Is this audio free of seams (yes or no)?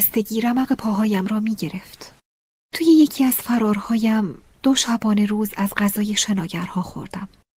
yes